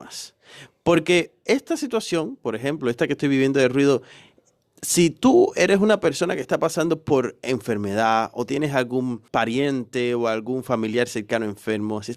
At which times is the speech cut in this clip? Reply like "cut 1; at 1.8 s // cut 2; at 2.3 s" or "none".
cut 1; at 9.3 s

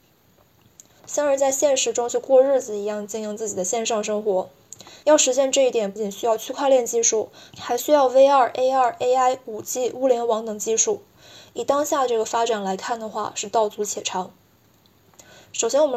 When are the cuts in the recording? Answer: cut 1; at 1.0 s // cut 2; at 6.0 s

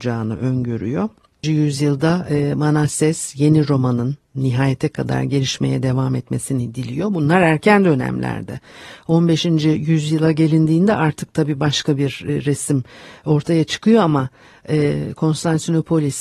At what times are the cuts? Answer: cut 1; at 1.4 s

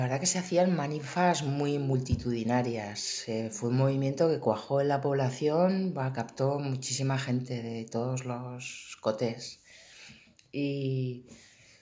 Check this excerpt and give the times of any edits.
none

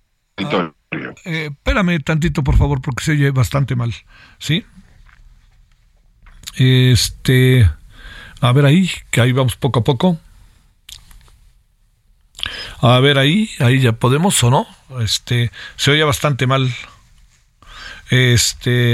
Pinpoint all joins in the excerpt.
none

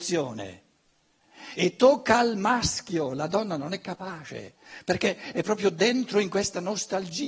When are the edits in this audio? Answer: none

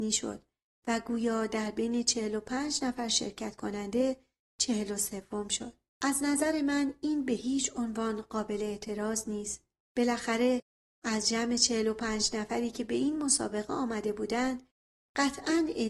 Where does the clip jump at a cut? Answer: none

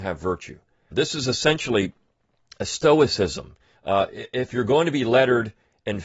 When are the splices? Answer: cut 1; at 0.9 s // cut 2; at 3.7 s

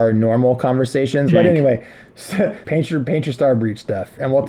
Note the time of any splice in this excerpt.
cut 1; at 1.3 s // cut 2; at 2.6 s

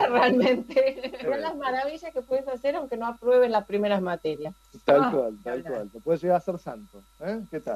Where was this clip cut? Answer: cut 1; at 1.3 s

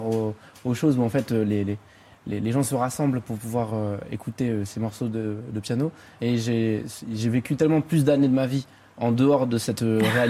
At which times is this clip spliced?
cut 1; at 6.2 s

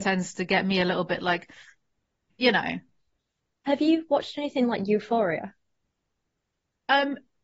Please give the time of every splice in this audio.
none

